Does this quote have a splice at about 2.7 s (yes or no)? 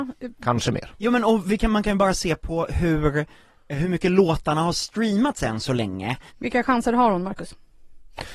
no